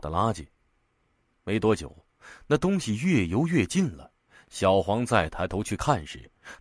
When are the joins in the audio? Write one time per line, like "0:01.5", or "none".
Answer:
none